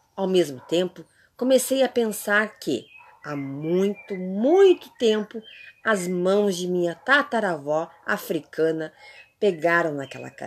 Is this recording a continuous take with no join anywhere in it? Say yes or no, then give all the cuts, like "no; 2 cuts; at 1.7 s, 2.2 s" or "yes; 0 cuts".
yes; 0 cuts